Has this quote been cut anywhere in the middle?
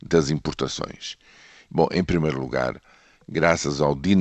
yes; 1 cut; at 1.7 s

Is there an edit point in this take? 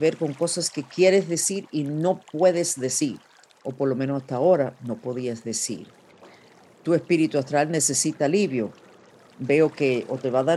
no; 0 cuts

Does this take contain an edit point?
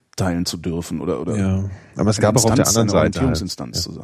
no; 0 cuts

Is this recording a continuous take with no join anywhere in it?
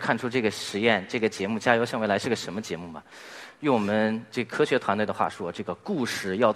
yes; 0 cuts

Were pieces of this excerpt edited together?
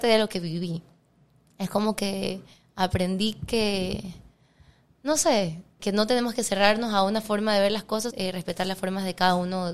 yes; 2 cuts; at 5.8 s, 8.1 s

